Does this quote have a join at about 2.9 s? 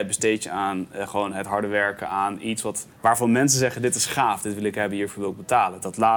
yes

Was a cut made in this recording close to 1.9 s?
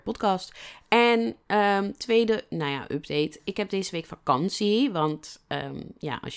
no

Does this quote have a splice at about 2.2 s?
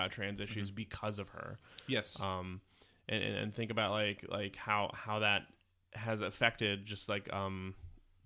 no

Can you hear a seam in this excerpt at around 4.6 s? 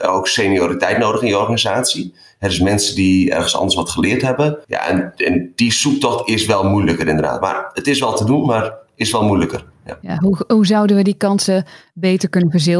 yes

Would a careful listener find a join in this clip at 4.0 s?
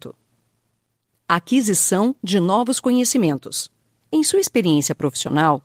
yes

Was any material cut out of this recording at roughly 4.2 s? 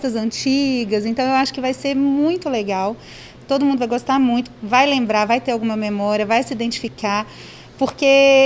no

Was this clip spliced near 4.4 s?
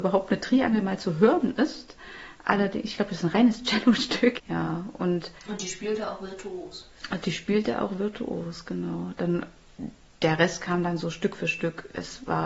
yes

